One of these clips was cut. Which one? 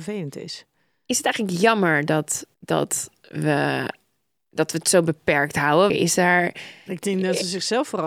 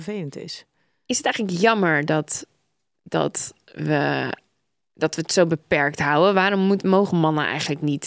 first; 2 cuts; at 2.5 s, 5.9 s

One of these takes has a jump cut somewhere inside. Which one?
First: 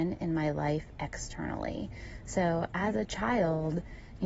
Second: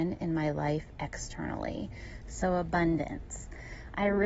second; 1 cut; at 2.2 s

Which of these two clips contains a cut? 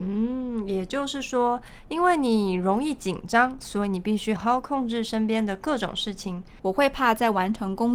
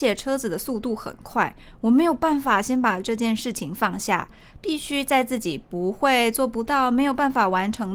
first; 2 cuts; at 4.4 s, 6.6 s

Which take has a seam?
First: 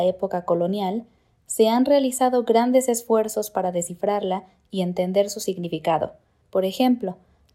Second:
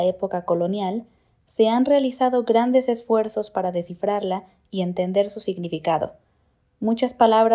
first; 1 cut; at 6.4 s

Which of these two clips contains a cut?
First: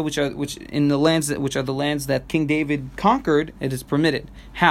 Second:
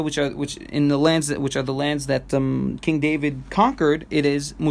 first; 2 cuts; at 2.3 s, 3.5 s

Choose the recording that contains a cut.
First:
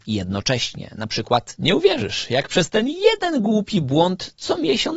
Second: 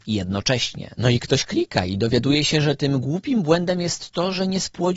second; 1 cut; at 0.9 s

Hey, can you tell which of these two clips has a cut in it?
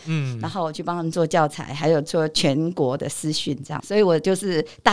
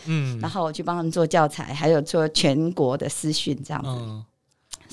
first; 1 cut; at 3.8 s

